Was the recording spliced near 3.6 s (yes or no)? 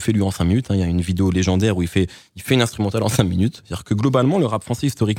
yes